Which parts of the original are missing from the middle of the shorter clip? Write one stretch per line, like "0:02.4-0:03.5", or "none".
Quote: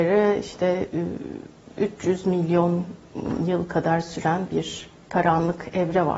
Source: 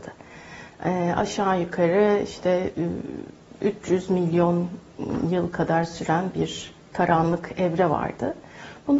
none